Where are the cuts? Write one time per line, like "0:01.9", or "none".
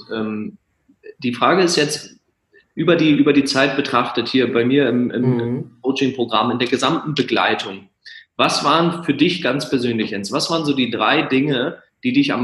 none